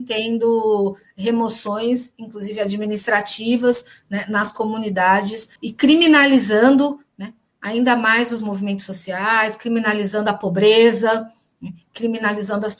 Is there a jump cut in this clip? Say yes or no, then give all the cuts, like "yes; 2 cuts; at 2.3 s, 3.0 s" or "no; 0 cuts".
yes; 1 cut; at 5.6 s